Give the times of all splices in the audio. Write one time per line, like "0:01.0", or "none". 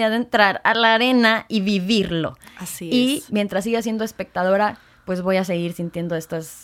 none